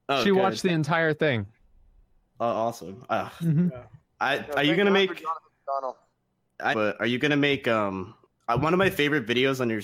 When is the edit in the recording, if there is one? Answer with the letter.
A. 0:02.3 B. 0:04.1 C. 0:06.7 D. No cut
C